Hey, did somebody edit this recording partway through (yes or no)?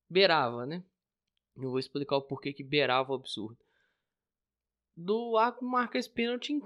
no